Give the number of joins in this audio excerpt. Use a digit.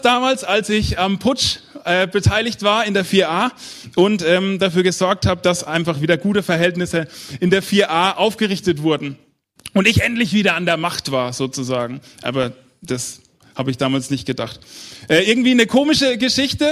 0